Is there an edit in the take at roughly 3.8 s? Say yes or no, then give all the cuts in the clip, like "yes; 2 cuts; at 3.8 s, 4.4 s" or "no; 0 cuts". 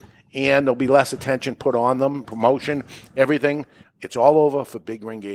yes; 2 cuts; at 2.2 s, 3.8 s